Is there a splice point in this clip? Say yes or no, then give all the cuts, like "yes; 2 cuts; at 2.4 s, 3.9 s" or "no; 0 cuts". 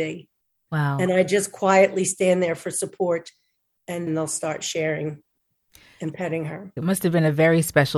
yes; 2 cuts; at 4.1 s, 6.8 s